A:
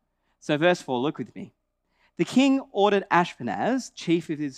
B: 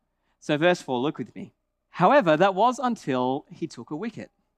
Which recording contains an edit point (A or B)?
B